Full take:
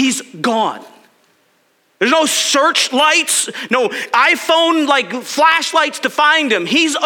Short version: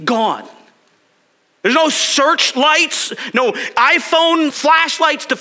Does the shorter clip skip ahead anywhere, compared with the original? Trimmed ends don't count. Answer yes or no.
yes